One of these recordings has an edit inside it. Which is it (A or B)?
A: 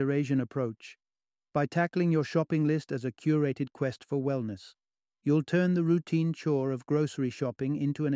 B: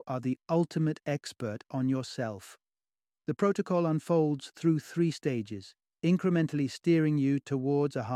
B